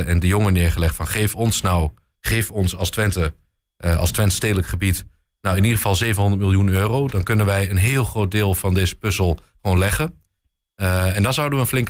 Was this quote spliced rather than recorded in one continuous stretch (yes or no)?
no